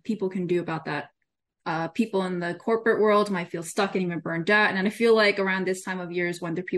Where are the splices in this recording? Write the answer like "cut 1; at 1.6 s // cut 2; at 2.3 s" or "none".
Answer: cut 1; at 1.6 s